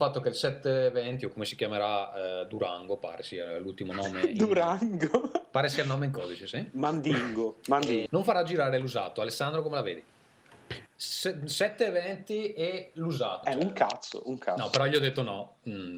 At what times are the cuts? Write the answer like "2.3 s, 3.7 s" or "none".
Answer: 8.1 s, 10.9 s, 13.4 s